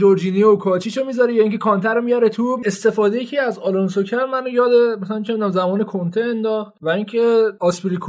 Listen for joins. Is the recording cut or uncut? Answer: cut